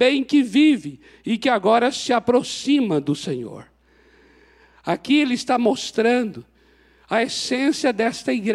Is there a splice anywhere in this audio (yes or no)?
no